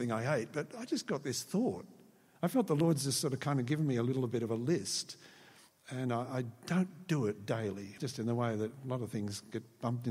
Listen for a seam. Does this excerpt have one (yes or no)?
yes